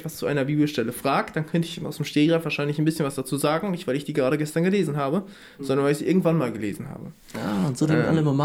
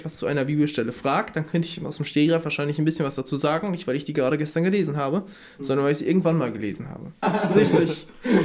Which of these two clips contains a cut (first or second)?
second